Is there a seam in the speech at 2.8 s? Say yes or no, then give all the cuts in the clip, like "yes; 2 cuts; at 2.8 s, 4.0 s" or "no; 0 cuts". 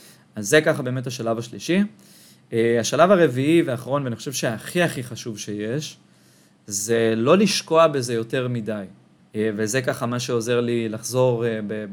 no; 1 cut; at 9.2 s